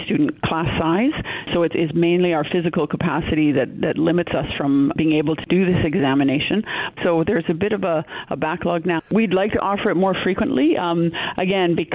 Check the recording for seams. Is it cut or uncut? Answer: cut